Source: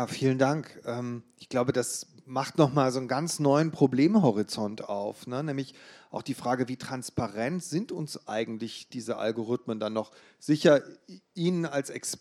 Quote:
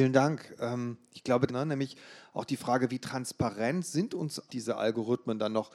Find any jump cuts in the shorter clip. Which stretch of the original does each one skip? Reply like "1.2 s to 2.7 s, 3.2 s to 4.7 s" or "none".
1.7 s to 5.2 s, 8.2 s to 8.9 s